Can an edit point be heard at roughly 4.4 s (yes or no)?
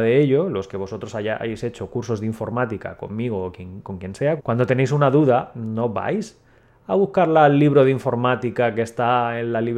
yes